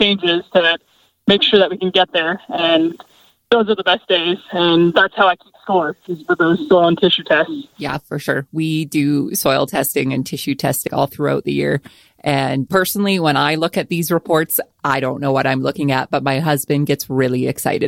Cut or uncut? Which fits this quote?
uncut